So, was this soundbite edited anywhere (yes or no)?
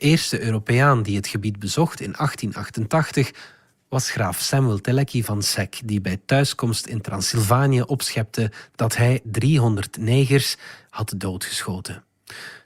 yes